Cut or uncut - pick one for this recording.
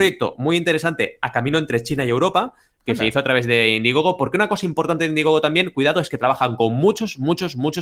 uncut